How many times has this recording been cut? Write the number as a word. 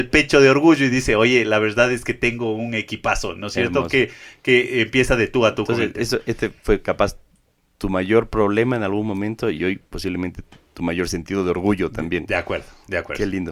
zero